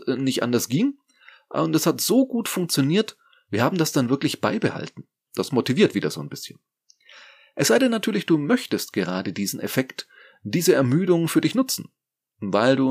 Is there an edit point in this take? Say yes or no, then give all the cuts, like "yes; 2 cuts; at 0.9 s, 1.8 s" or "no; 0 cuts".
yes; 1 cut; at 5.3 s